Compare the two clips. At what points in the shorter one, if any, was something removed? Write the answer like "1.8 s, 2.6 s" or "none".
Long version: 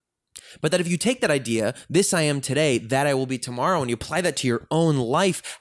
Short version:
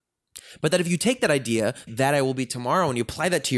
1.9 s